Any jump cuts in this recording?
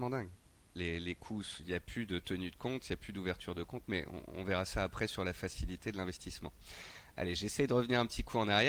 no; 0 cuts

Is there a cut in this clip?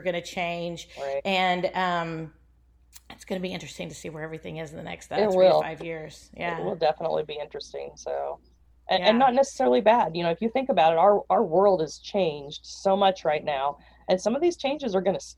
no; 0 cuts

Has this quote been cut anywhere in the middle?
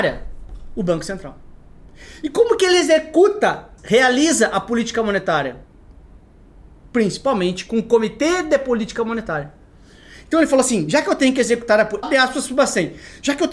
yes; 2 cuts; at 3.8 s, 12.0 s

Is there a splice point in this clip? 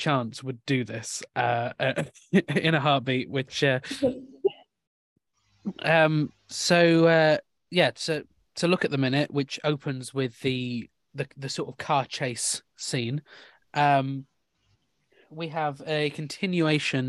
no; 0 cuts

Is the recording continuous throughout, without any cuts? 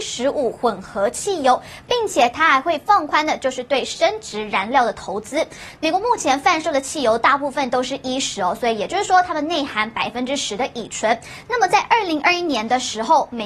no; 1 cut; at 5.8 s

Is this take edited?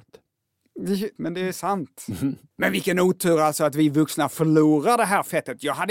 yes; 1 cut; at 1.2 s

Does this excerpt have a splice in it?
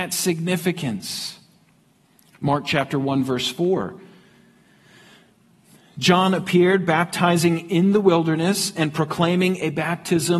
no; 0 cuts

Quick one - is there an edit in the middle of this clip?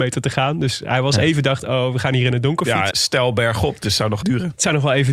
yes; 2 cuts; at 2.9 s, 4.2 s

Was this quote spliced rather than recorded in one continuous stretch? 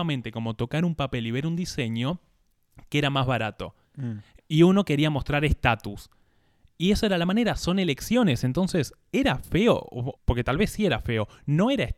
yes; 2 cuts; at 3.8 s, 10.2 s

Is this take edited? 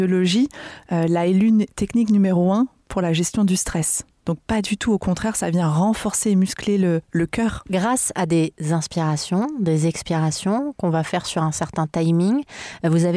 no; 0 cuts

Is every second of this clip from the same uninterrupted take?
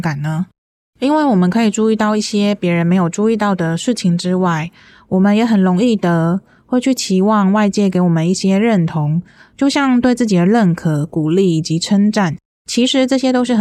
yes; 0 cuts

